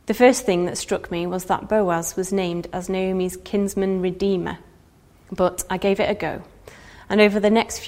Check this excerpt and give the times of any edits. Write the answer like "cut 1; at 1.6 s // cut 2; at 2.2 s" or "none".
cut 1; at 5.3 s